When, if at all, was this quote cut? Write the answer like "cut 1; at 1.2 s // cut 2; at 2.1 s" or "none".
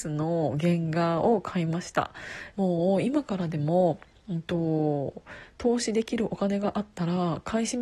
cut 1; at 2.5 s

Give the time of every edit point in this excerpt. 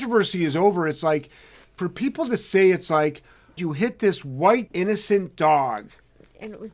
cut 1; at 3.6 s // cut 2; at 4.7 s

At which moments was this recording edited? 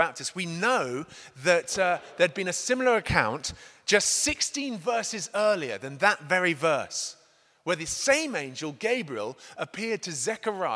none

